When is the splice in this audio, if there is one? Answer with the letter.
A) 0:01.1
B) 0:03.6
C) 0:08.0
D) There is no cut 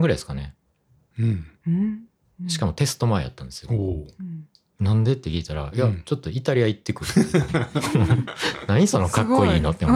A